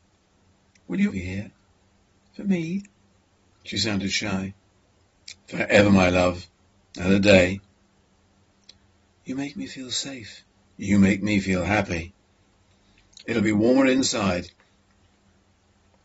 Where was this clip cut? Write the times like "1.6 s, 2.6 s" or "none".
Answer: 1.1 s, 13.2 s